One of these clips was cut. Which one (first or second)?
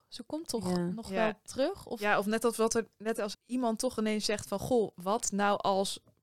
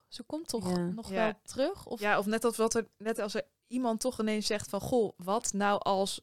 first